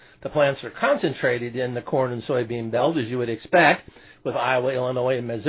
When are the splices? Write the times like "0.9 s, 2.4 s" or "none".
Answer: none